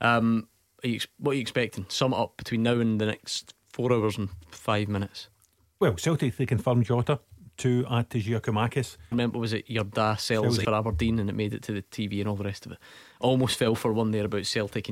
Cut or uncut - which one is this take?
cut